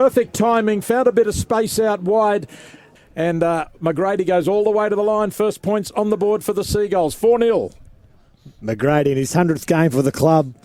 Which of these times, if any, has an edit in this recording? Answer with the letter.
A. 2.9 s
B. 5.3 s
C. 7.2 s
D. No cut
A